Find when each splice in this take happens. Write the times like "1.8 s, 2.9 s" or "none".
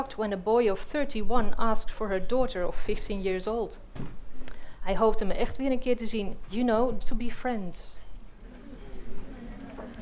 7.0 s